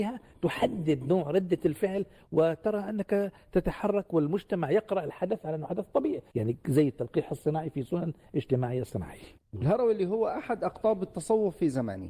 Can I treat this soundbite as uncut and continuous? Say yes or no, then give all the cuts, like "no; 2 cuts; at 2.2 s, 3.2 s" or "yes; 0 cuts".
no; 2 cuts; at 6.3 s, 9.4 s